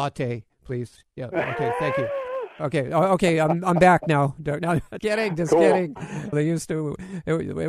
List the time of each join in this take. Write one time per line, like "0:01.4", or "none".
0:05.0
0:06.3